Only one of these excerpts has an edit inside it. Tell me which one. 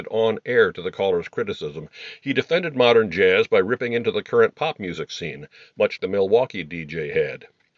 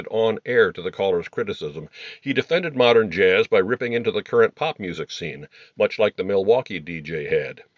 first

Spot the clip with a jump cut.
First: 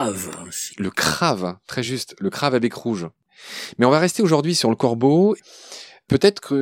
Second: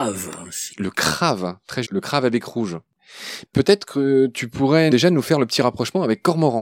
second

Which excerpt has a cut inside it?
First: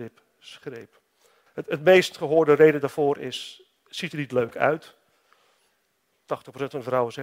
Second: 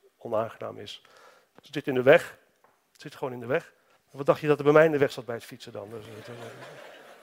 second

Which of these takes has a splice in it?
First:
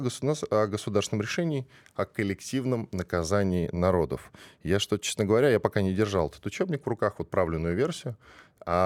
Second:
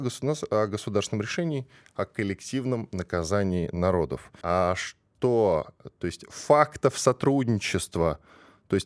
second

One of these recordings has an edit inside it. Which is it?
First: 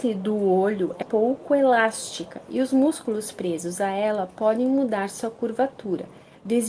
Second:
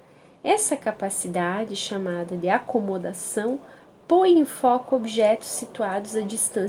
first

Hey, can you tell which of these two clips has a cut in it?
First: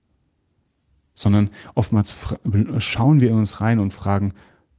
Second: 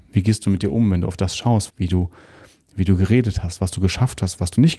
second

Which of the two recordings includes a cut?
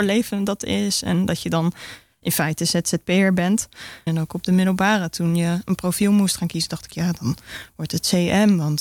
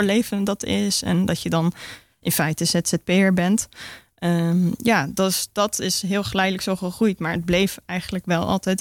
first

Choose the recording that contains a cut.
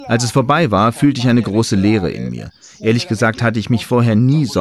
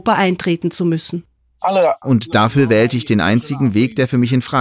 second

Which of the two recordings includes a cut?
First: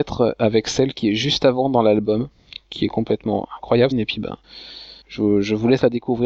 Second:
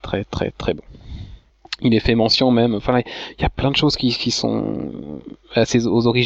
first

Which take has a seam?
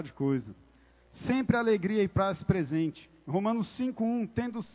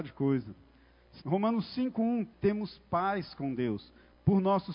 second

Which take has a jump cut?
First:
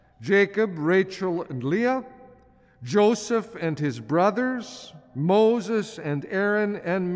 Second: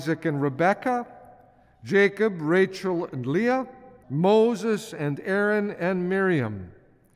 second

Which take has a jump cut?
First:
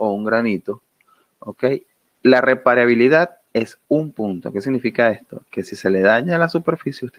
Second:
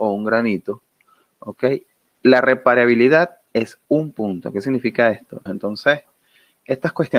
second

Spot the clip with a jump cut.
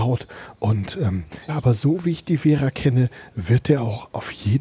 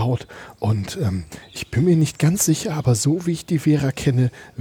first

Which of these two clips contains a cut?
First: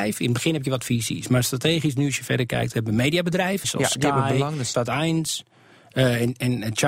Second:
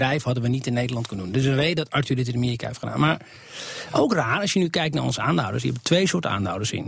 first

